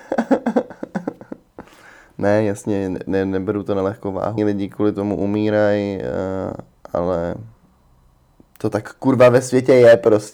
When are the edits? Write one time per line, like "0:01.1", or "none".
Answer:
0:04.4

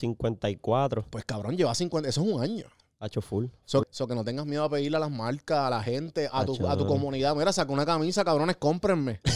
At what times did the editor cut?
0:03.8

